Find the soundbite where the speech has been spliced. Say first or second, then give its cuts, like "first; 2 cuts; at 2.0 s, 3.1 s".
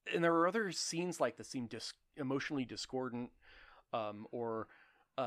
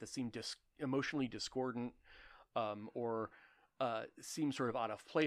first; 1 cut; at 1.4 s